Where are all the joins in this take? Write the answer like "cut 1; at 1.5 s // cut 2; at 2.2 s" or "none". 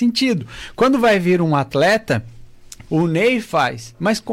cut 1; at 2.9 s